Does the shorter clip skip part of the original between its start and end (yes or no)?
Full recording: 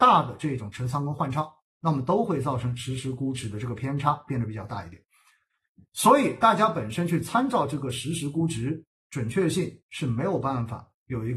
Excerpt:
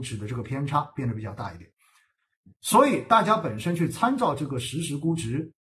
no